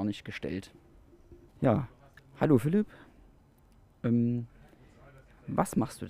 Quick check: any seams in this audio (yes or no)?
yes